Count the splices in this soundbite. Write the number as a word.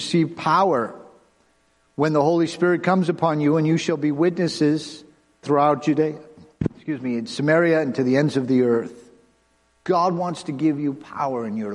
two